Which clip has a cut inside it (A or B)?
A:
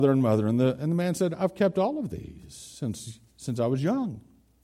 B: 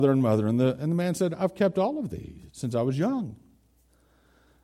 B